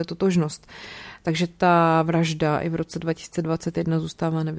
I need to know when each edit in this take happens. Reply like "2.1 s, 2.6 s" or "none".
none